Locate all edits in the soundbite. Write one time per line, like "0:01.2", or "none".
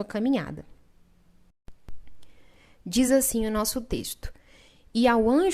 none